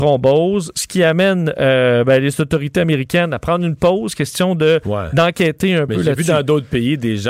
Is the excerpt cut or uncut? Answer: uncut